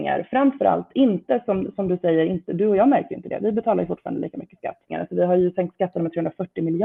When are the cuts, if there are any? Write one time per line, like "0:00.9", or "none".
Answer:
0:04.9